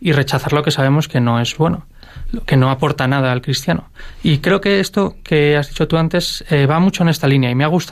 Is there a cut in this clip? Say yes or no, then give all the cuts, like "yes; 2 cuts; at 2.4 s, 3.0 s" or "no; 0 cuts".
no; 0 cuts